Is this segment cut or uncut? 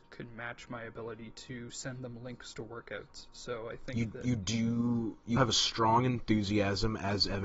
cut